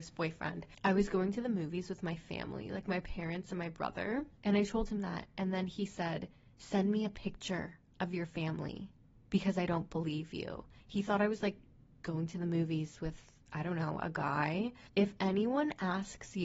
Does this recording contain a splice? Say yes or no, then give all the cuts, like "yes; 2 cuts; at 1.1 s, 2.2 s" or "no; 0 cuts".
no; 0 cuts